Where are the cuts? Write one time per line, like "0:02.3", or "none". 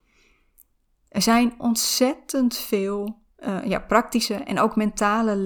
0:03.3